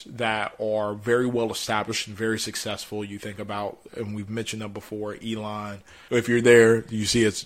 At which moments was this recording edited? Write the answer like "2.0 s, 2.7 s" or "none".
3.9 s, 6.1 s